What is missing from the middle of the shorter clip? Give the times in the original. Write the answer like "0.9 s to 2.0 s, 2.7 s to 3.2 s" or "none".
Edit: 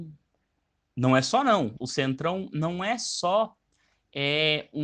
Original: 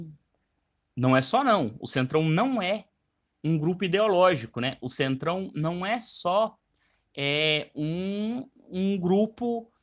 1.8 s to 4.8 s